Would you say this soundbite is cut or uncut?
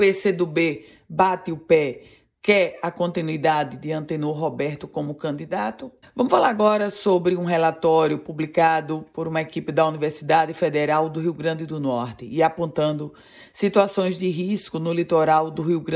cut